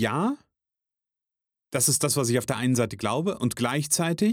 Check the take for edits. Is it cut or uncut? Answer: uncut